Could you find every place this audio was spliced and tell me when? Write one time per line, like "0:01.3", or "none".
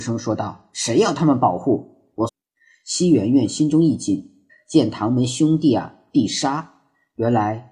0:02.3
0:04.5